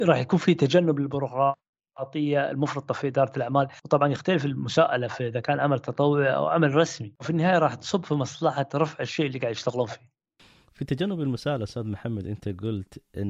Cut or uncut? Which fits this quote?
uncut